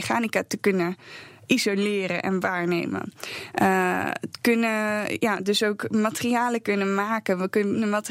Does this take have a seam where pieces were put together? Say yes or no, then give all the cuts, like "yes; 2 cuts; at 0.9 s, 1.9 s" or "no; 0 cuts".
no; 0 cuts